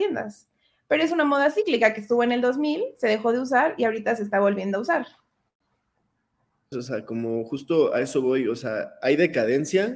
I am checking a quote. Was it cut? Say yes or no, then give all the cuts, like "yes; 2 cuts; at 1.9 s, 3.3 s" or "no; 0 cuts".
yes; 1 cut; at 6.7 s